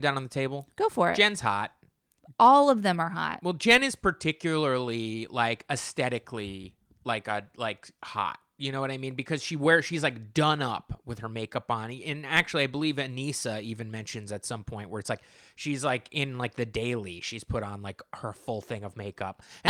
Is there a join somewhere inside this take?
no; 0 cuts

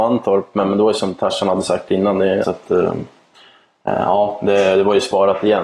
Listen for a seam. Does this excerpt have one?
yes; 1 cut; at 2.4 s

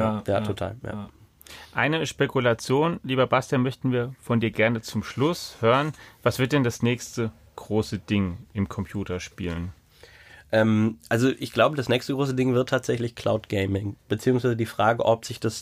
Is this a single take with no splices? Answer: yes; 0 cuts

